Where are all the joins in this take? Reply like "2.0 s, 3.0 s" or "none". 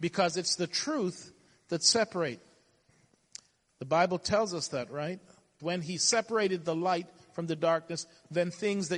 5.6 s